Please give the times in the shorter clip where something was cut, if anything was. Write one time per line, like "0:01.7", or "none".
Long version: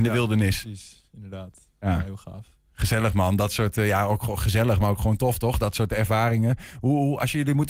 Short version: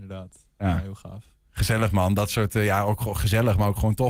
none